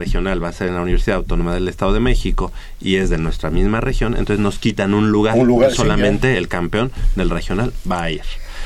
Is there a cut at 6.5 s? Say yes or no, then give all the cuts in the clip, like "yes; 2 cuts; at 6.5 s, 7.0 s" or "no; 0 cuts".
no; 0 cuts